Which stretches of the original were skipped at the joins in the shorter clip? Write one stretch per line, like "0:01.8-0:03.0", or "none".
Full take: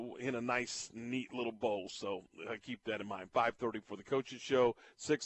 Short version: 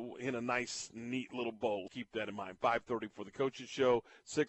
0:01.9-0:02.6